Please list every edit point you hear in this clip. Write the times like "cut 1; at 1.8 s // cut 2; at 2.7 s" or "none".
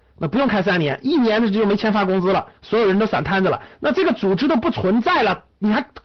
none